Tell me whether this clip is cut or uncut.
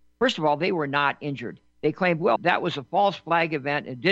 cut